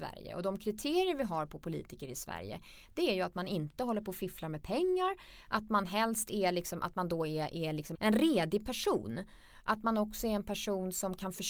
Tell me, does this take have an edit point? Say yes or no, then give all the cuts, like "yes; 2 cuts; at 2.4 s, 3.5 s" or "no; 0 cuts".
yes; 1 cut; at 7.9 s